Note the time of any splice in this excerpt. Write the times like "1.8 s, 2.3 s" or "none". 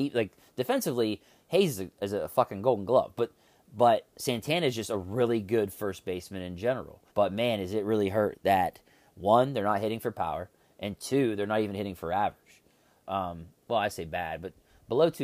4.1 s, 7.1 s, 13.0 s

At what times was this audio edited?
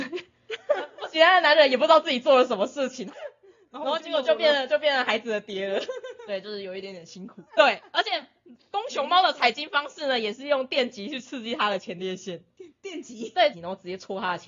3.1 s, 7.5 s, 13.5 s

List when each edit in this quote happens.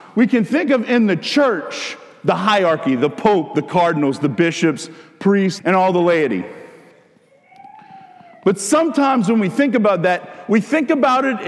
5.6 s

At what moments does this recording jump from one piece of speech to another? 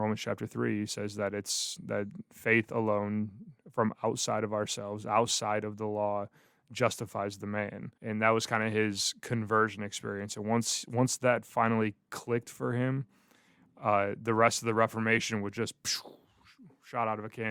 8.0 s

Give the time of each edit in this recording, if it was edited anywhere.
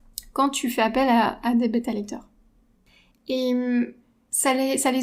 3.1 s

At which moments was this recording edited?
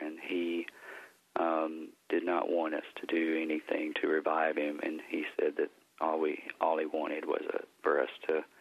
none

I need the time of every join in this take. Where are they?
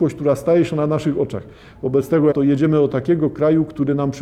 2.3 s

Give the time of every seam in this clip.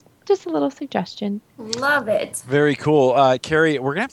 1.5 s

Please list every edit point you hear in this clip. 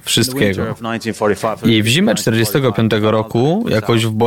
none

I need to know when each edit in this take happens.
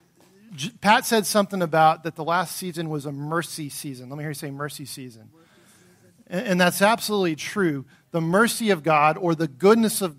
none

